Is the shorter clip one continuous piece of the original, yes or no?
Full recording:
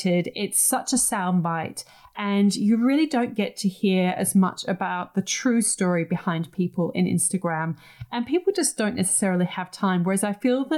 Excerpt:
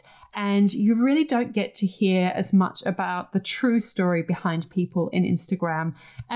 yes